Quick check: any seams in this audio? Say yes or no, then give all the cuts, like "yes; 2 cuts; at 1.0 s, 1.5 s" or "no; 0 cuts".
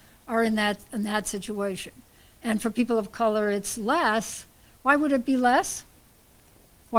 no; 0 cuts